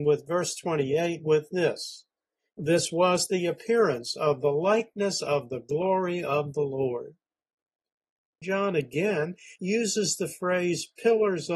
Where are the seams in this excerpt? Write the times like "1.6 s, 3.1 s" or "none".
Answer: 8.4 s, 9.6 s